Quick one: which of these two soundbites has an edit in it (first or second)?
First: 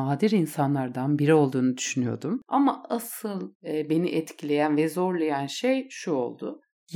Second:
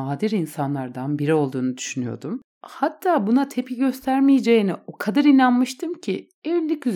first